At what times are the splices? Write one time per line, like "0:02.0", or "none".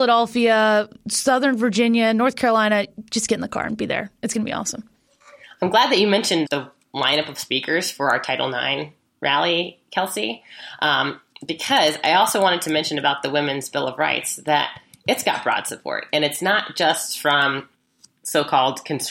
0:06.4